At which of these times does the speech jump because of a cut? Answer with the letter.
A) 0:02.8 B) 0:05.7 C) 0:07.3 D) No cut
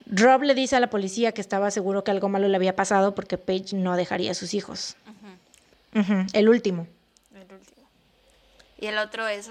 B